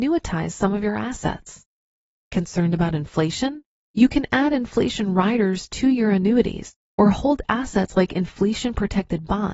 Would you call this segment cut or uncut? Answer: uncut